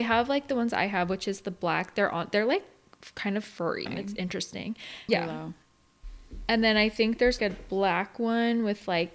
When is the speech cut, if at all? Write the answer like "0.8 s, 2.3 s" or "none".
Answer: 3.9 s, 5.1 s, 7.4 s